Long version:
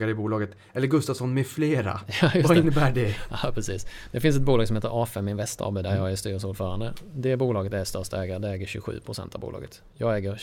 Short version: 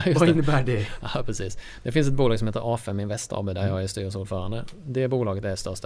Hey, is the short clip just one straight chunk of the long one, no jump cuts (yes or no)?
yes